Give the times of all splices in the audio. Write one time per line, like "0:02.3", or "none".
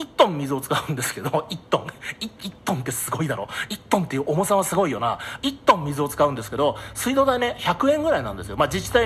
none

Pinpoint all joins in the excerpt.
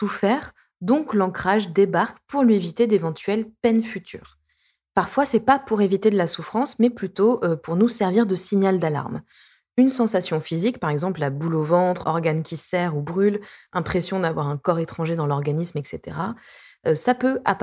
0:12.0

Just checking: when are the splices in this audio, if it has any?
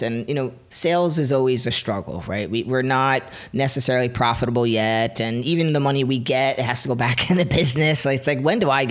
none

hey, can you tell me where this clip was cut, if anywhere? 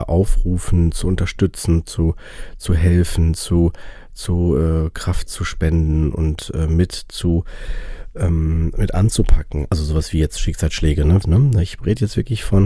0:09.7
0:11.2

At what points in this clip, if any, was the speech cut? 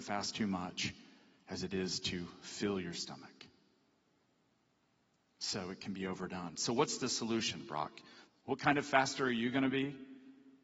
0:08.3

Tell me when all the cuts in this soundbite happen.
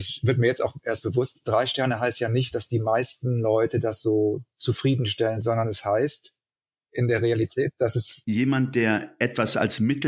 0:05.4

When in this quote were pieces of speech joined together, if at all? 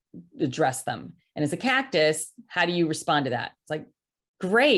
none

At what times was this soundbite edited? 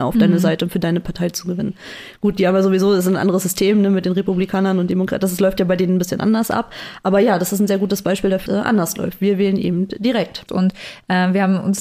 0:08.5
0:10.5

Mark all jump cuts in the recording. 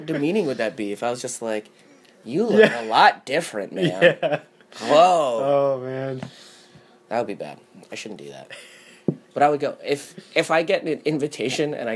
none

